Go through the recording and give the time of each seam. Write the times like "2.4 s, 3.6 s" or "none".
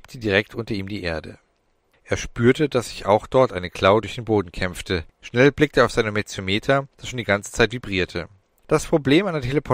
5.1 s, 8.6 s